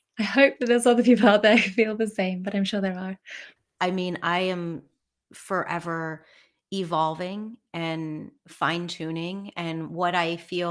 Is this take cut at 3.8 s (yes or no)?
yes